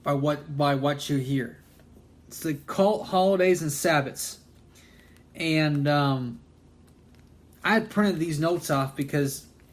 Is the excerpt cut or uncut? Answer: cut